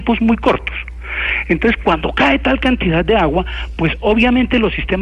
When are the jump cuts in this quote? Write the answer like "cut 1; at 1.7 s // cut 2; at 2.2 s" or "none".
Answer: none